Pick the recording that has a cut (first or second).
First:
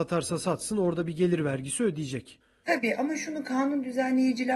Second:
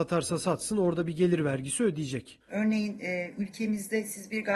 second